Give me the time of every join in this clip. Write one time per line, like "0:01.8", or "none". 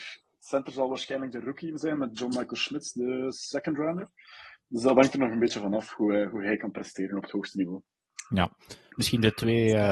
none